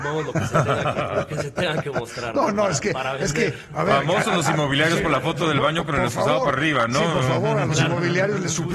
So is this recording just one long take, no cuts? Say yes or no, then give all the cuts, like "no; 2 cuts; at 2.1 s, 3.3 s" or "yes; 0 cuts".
yes; 0 cuts